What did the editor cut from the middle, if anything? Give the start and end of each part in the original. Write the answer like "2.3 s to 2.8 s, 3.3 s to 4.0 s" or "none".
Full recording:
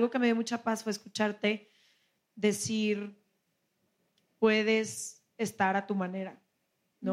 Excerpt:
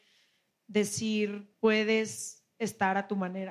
3.2 s to 4.3 s

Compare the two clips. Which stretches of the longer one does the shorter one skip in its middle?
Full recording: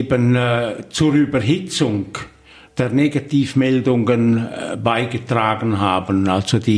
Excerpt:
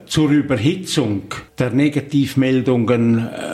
2.3 s to 2.7 s

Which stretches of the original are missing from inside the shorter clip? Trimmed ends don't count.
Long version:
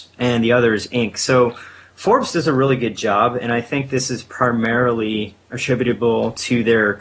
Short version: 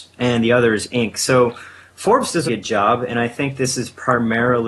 2.5 s to 2.8 s

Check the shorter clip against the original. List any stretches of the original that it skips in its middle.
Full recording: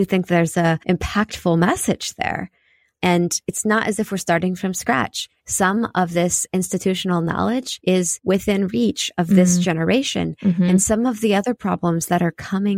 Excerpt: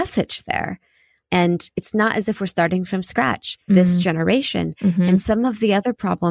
5.4 s to 9.3 s

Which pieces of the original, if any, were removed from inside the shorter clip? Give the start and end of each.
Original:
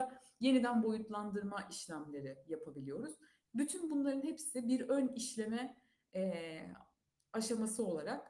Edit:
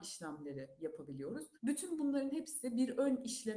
3.2 s to 3.5 s

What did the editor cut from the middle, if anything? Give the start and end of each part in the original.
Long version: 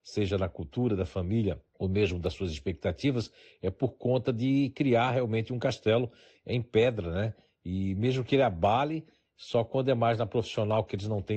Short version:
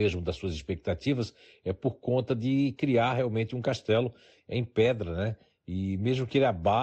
none

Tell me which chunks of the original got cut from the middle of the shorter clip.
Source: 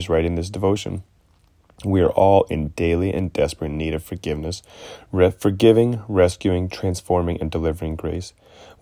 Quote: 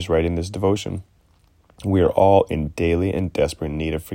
none

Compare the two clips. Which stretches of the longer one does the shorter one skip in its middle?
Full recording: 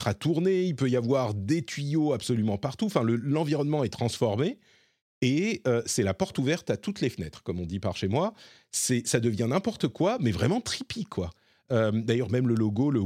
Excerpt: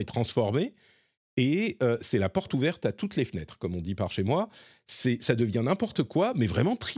none

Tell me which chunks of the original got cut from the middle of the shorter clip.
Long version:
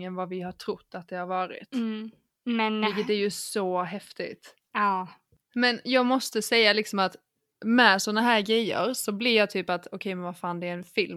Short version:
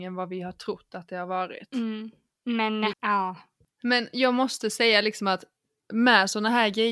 2.9 s to 4.6 s

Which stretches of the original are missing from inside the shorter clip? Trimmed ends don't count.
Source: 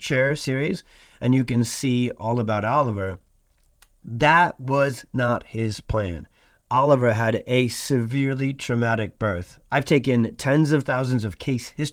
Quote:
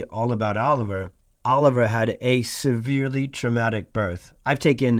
3.4 s to 6.6 s

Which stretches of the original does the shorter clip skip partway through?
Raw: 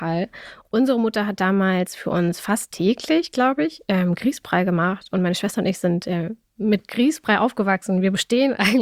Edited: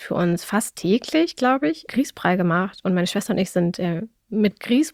3.8 s to 4.2 s

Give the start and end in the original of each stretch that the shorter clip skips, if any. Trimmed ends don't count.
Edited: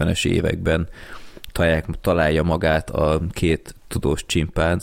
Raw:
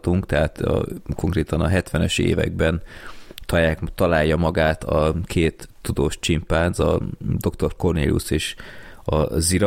none

